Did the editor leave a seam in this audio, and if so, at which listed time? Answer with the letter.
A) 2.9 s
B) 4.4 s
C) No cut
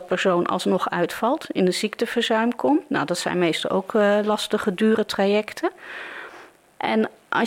C